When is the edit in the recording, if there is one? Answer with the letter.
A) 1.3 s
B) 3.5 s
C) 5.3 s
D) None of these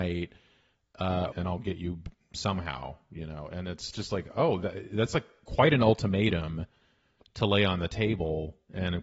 A